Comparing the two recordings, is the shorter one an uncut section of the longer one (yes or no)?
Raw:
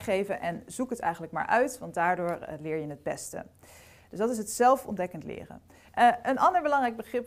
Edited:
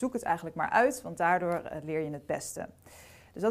yes